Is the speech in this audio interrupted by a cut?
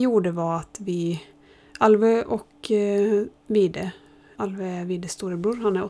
no; 0 cuts

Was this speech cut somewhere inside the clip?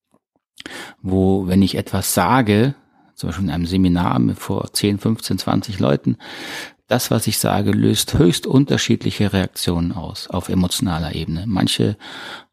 no; 0 cuts

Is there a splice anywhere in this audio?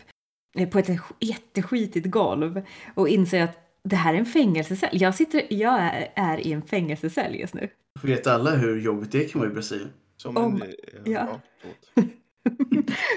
no; 0 cuts

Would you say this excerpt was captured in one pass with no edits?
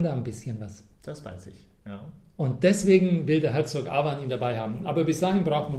no; 1 cut; at 0.9 s

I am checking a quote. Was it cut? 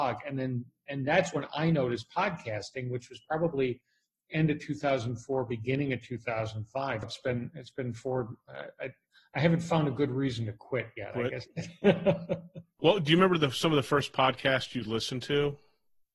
yes; 1 cut; at 7.0 s

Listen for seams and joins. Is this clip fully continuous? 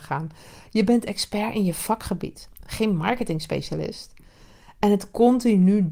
yes; 0 cuts

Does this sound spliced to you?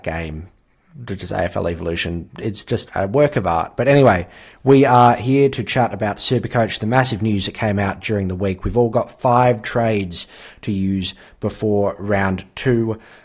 yes; 1 cut; at 2.9 s

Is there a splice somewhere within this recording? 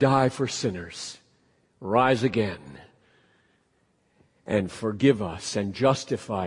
no; 0 cuts

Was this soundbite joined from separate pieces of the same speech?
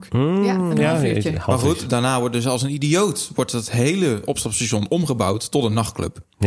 no; 0 cuts

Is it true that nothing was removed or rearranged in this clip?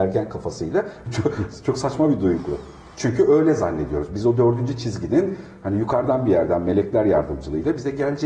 no; 1 cut; at 1.1 s

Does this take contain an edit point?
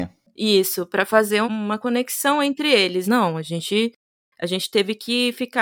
yes; 2 cuts; at 1.4 s, 3.0 s

